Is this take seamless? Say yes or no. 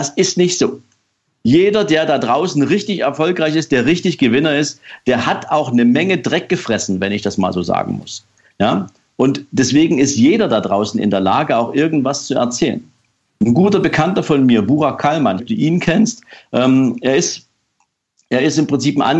no